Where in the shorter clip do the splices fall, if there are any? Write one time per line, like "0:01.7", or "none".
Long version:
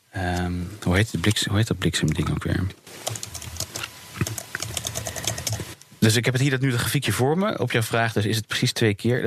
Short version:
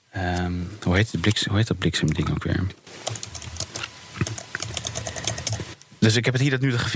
none